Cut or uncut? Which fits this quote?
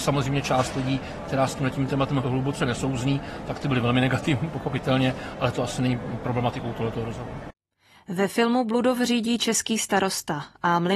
uncut